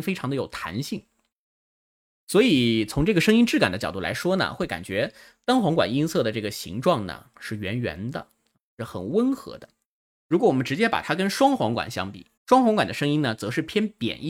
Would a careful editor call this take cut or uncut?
cut